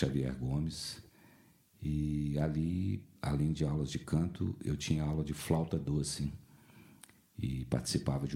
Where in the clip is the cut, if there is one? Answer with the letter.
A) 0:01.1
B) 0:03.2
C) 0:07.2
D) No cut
D